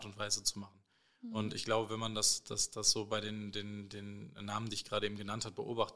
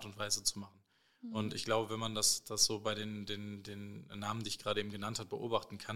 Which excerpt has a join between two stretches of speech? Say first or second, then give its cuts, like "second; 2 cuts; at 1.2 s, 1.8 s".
second; 1 cut; at 2.4 s